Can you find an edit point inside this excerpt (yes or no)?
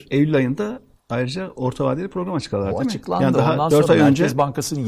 no